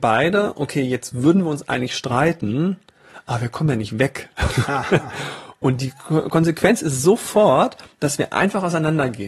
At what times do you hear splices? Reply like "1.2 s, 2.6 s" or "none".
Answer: none